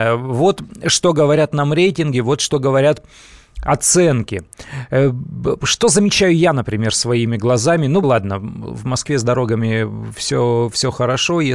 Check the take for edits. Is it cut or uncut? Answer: cut